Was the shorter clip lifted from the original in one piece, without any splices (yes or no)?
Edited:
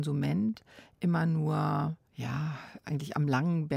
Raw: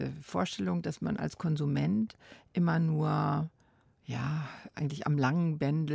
no